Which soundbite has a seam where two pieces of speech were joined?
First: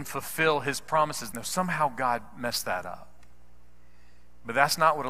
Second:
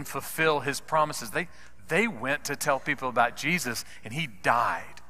first; 1 cut; at 1.3 s

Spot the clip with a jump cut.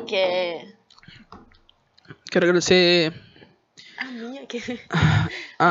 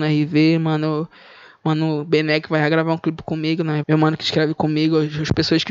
second; 1 cut; at 3.8 s

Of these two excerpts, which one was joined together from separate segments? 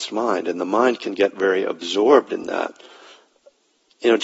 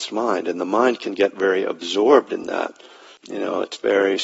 second; 1 cut; at 3.2 s

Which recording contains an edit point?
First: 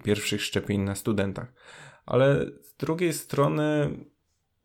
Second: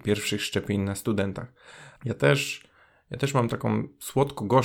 second; 1 cut; at 2.0 s

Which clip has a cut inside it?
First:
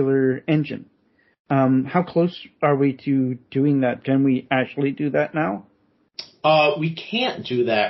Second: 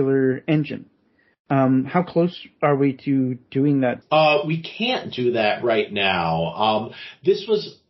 second; 1 cut; at 4.0 s

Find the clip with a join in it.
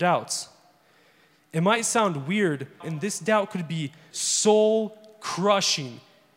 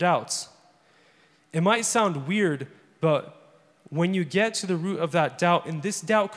first; 2 cuts; at 2.8 s, 4.1 s

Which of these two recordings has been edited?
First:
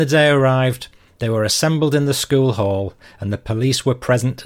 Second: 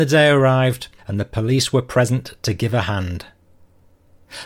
second; 1 cut; at 1.0 s

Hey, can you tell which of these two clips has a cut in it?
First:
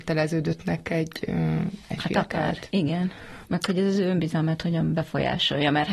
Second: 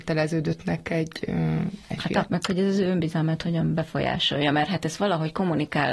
second; 1 cut; at 2.3 s

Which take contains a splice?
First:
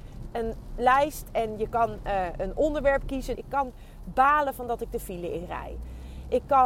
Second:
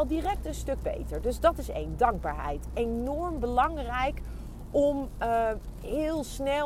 first; 1 cut; at 3.3 s

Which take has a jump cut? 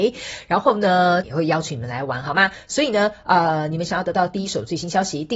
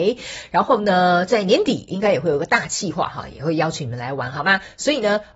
first; 1 cut; at 1.2 s

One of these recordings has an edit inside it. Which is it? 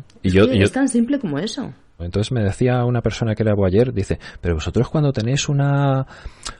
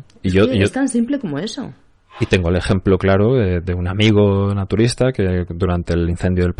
first; 1 cut; at 2.0 s

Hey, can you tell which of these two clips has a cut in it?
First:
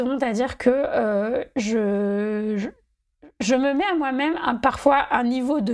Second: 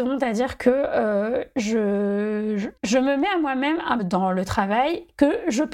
second; 2 cuts; at 2.8 s, 4.0 s

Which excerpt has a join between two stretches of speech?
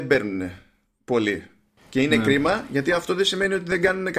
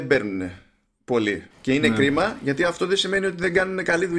second; 1 cut; at 1.5 s

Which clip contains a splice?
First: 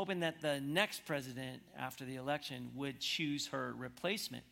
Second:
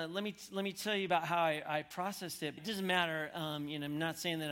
second; 1 cut; at 2.6 s

